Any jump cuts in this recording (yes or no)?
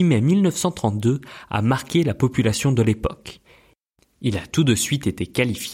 no